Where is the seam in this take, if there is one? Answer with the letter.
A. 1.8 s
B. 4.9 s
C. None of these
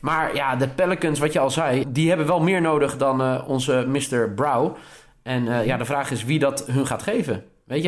A